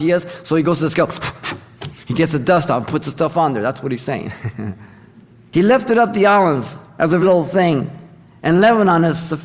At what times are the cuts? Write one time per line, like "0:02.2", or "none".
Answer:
0:07.2